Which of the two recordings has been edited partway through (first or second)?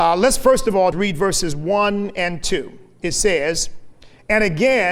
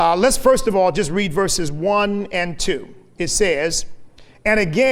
first